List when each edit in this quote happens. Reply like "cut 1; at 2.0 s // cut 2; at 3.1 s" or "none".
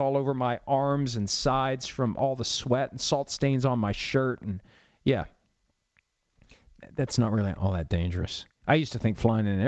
cut 1; at 8.6 s